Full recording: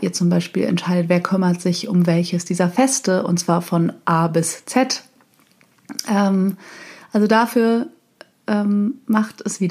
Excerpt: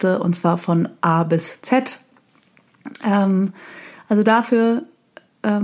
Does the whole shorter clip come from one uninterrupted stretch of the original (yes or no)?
yes